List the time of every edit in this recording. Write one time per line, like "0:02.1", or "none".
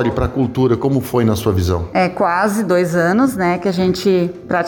none